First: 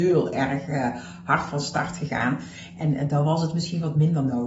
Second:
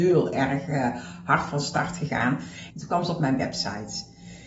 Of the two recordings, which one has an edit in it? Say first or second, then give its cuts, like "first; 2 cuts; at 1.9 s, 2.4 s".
second; 1 cut; at 2.7 s